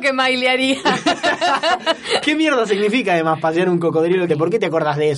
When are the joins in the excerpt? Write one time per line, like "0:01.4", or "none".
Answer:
0:04.3